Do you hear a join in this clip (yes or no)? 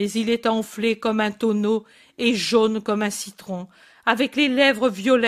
no